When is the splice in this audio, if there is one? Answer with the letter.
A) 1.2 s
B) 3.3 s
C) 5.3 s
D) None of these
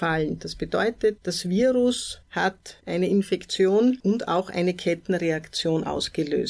A